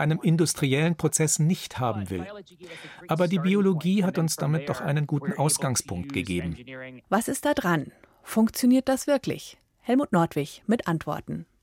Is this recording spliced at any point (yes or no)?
yes